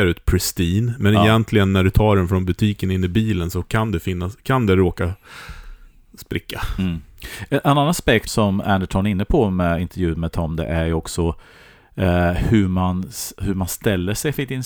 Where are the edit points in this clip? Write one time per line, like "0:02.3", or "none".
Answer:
0:08.3